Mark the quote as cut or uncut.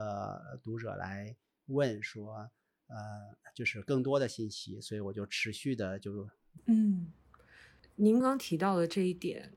cut